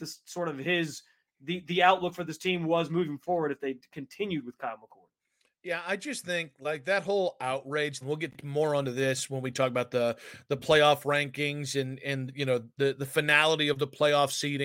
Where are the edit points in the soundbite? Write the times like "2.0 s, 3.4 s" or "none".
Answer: 8.0 s